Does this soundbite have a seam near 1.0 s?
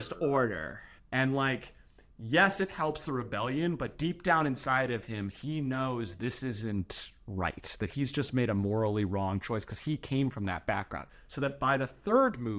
yes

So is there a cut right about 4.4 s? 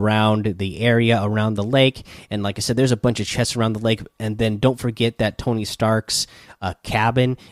no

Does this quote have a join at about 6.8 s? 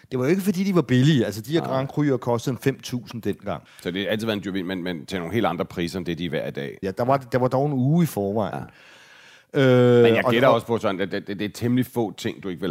yes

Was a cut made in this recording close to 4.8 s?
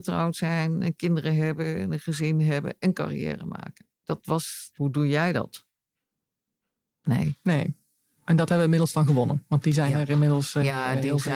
yes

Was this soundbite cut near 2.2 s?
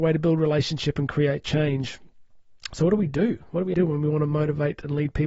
no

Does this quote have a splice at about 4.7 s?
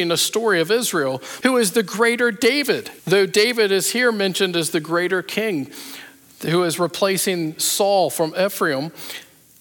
no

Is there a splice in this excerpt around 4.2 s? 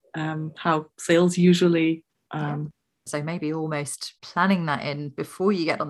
yes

